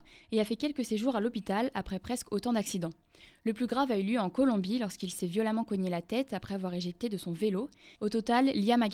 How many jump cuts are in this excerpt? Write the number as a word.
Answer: one